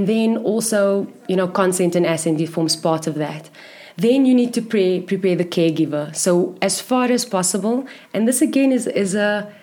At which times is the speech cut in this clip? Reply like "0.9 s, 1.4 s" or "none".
none